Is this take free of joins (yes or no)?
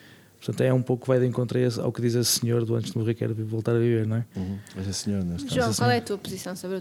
yes